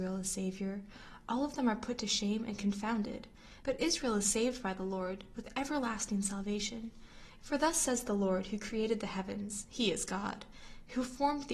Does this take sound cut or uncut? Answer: cut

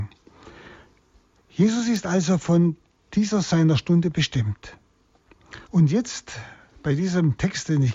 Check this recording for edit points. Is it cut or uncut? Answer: cut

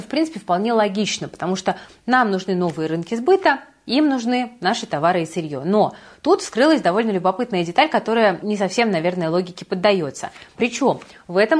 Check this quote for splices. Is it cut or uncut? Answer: cut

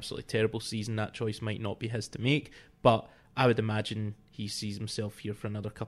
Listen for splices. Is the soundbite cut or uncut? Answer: uncut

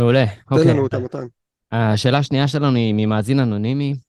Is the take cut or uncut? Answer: uncut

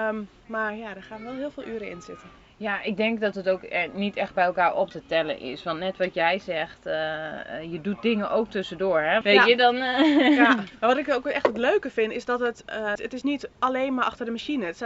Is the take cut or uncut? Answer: cut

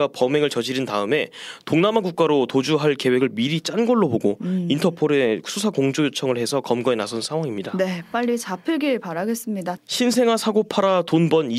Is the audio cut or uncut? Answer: cut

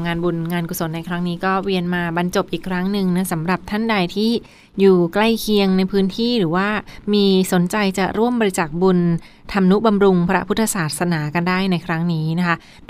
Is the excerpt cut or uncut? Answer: uncut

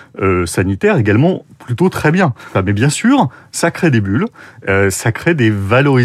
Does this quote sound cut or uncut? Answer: cut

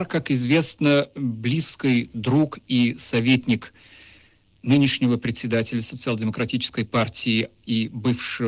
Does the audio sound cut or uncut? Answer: uncut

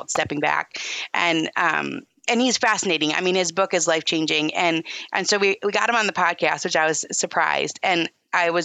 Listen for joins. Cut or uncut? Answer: uncut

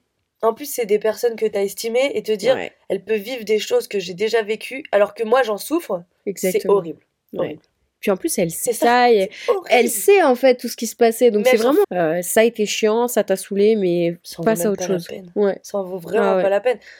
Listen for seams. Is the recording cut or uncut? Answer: cut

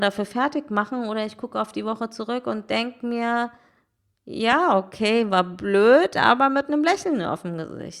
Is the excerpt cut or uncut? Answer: uncut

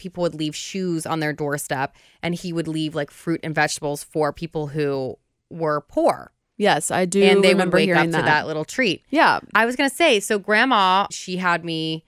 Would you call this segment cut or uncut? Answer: cut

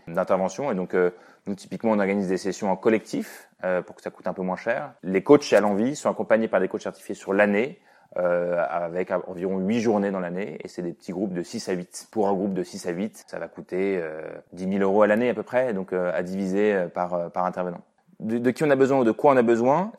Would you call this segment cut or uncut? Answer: uncut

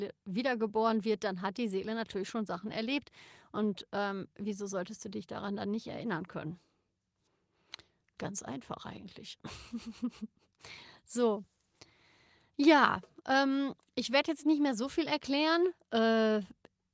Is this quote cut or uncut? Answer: uncut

